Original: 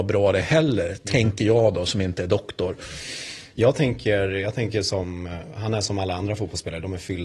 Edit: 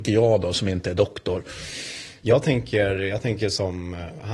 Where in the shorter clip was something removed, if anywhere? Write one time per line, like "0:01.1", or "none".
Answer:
none